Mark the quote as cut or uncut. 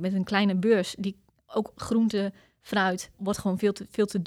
cut